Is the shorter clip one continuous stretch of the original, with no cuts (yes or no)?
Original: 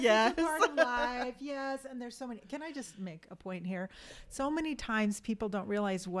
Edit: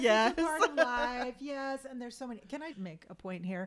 no